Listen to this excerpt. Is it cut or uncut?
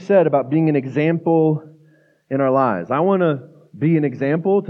uncut